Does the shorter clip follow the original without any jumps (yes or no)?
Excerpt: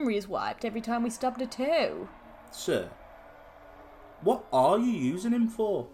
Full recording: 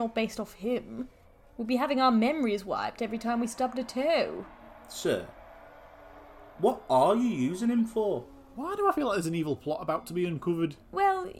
yes